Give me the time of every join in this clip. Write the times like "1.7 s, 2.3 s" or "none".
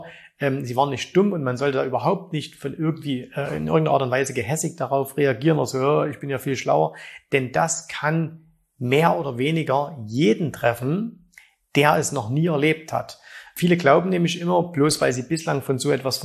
none